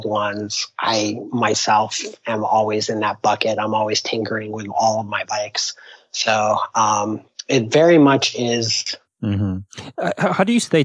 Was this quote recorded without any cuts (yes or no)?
no